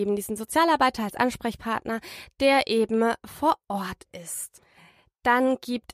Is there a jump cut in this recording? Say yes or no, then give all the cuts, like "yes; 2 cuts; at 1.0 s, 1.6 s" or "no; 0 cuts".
no; 0 cuts